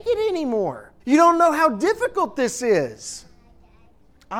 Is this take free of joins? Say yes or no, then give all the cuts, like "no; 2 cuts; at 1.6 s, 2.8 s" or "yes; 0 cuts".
no; 1 cut; at 1.0 s